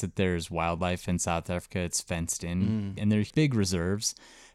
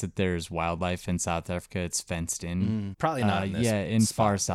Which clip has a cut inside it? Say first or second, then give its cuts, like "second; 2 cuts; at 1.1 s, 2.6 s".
second; 1 cut; at 2.9 s